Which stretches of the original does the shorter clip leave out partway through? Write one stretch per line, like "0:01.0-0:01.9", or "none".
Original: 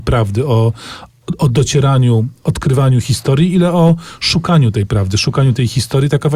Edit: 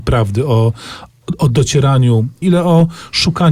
0:02.4-0:03.5